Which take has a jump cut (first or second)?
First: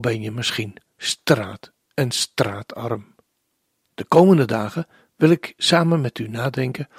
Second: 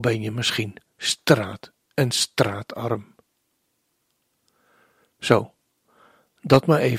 first